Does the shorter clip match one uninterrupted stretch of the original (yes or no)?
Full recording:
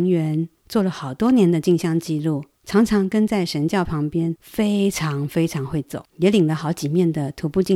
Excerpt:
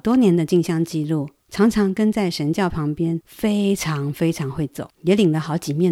yes